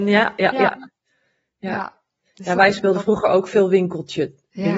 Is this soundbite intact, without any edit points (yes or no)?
yes